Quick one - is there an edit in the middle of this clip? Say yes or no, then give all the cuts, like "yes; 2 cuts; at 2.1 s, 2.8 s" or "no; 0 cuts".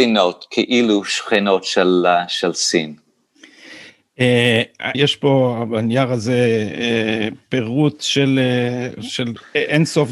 yes; 1 cut; at 4.9 s